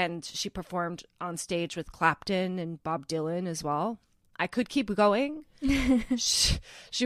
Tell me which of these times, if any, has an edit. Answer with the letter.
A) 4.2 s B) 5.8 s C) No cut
A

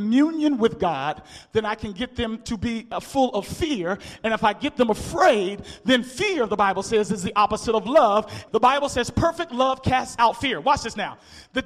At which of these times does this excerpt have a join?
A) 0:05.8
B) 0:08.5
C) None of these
B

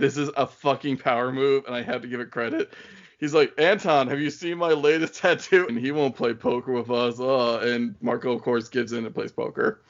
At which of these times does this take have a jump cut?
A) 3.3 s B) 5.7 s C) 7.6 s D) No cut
B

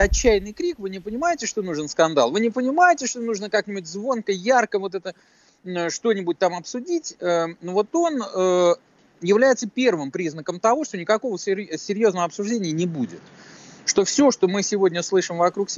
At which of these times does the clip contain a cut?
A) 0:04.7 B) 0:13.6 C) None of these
C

